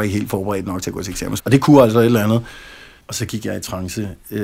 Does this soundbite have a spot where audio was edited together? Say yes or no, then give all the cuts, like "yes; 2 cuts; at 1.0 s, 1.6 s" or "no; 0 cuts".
yes; 2 cuts; at 1.4 s, 3.0 s